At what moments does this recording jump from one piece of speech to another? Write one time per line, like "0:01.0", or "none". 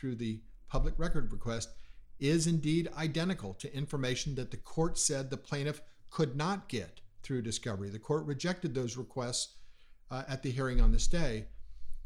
none

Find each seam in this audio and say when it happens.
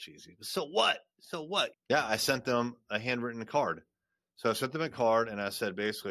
0:01.7

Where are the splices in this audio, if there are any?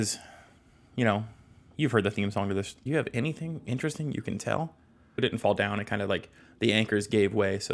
0:02.9
0:05.2

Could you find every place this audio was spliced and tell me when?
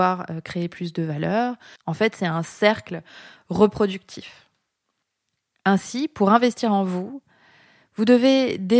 0:01.8

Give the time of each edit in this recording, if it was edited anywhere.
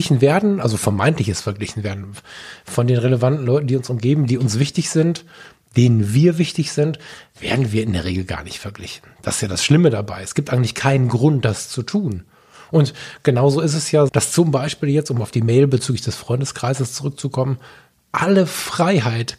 0:14.1

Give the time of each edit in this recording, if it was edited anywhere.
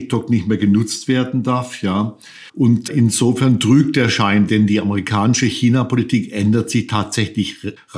0:02.5
0:04.5

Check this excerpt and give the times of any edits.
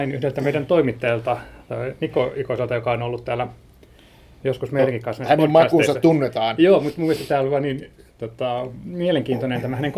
none

